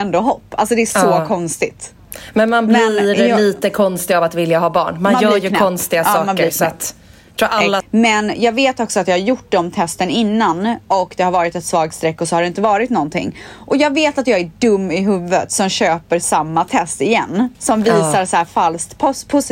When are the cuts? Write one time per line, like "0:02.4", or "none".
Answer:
0:07.8
0:17.5